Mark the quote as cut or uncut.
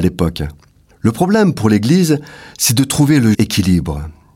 cut